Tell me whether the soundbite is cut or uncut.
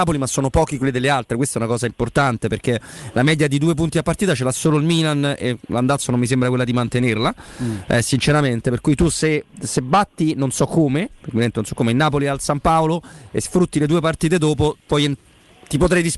uncut